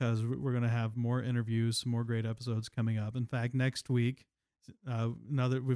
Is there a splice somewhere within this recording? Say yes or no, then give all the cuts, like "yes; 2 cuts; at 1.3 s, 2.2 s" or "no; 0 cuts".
no; 0 cuts